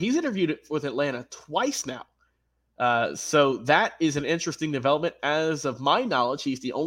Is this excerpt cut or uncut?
uncut